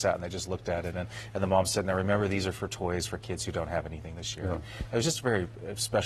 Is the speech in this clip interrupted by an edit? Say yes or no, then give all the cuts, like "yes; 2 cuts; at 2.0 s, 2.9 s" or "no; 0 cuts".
no; 0 cuts